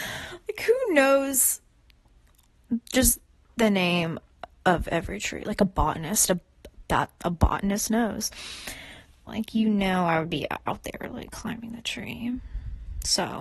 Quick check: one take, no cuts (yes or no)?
no